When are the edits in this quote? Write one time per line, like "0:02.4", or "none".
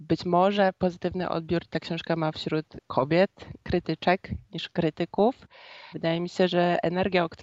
0:05.9